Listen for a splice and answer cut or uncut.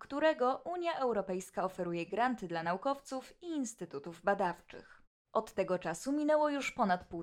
cut